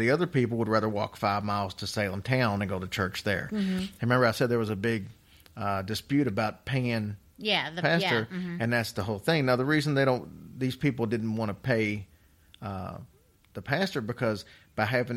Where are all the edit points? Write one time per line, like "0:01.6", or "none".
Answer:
none

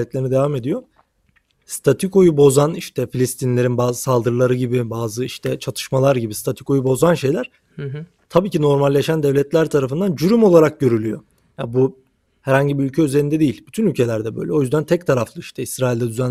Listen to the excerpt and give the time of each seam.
none

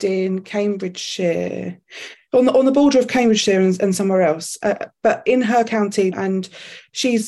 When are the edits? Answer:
0:06.1

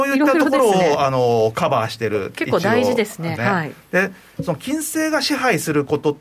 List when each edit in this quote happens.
0:03.4

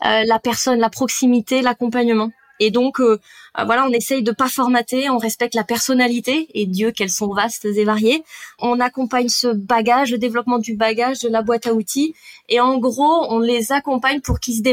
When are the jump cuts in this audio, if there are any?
none

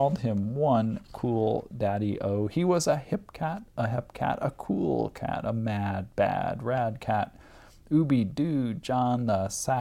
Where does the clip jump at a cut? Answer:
none

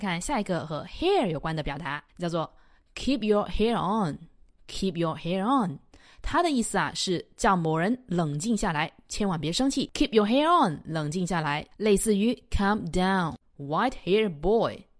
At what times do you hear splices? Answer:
0:02.1
0:13.4

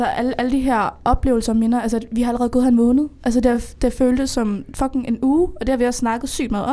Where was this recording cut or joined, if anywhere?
none

